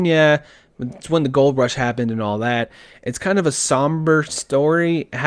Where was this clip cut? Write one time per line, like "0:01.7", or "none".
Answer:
none